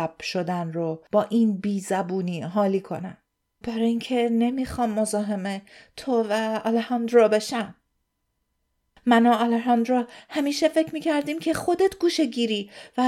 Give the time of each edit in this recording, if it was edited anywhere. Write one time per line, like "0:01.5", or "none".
0:03.6

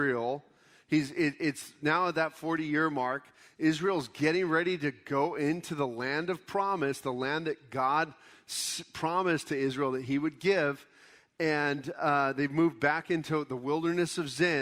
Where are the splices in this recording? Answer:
none

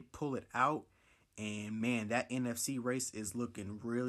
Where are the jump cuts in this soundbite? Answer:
none

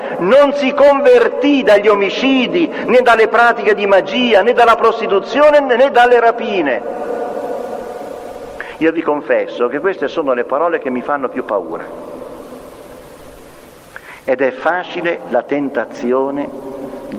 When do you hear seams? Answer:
none

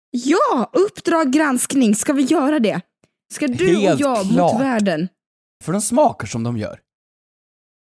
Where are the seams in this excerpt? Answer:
0:05.6

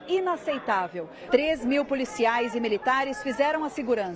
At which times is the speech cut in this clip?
0:01.3

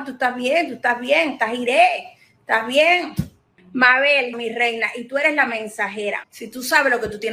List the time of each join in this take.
0:04.3
0:06.2

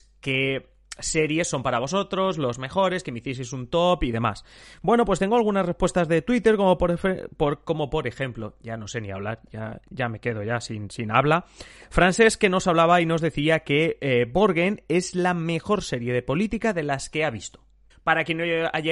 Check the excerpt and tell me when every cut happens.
0:17.9

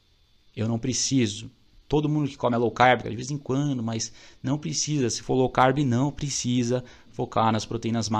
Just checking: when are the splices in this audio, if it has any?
0:03.0

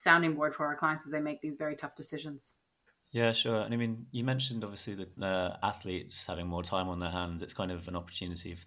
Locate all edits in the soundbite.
0:05.2

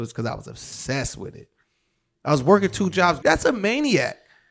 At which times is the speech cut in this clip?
0:03.2

